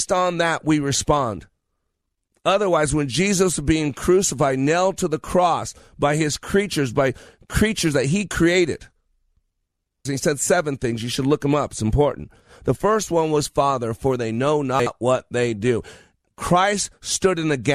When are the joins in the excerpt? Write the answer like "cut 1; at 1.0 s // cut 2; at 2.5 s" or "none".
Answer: cut 1; at 10.1 s // cut 2; at 13.5 s